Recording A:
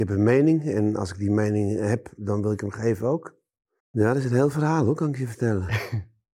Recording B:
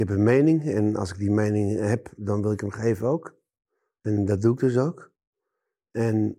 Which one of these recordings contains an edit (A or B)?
A